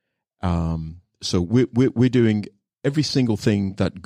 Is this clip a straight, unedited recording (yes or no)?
yes